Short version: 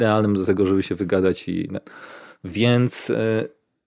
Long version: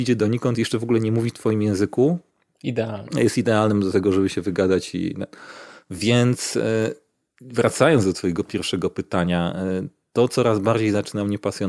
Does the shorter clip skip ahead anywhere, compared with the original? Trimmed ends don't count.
no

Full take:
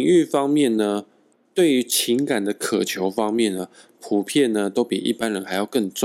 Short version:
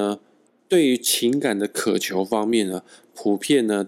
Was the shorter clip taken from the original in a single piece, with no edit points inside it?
yes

